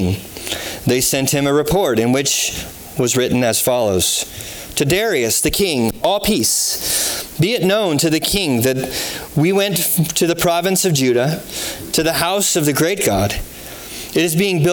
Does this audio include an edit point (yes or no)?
no